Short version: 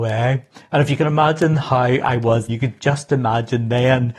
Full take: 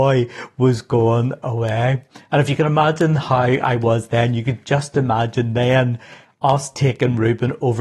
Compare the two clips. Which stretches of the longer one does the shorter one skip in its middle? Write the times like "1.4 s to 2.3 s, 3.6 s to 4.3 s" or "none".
4.1 s to 4.3 s